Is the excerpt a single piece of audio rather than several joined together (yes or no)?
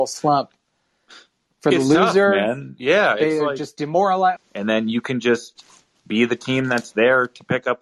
no